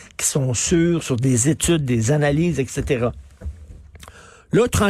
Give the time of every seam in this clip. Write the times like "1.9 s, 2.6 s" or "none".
none